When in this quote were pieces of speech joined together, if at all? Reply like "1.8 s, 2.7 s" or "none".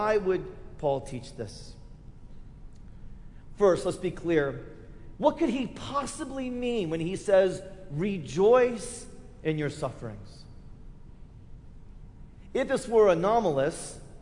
5.1 s